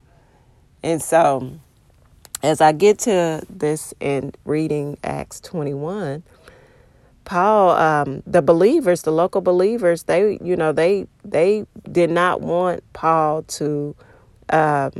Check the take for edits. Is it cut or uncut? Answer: uncut